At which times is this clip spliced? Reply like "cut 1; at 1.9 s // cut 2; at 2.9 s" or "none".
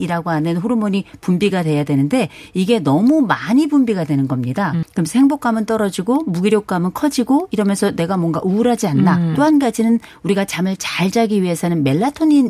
cut 1; at 4.8 s // cut 2; at 9.4 s